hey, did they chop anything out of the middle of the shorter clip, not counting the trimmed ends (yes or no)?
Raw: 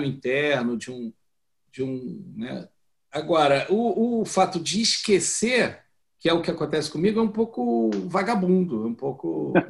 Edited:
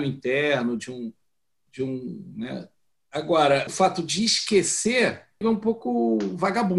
yes